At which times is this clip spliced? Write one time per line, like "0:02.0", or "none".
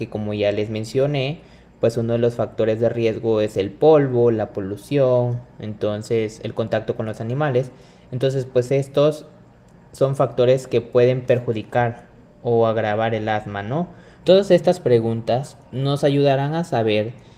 0:14.2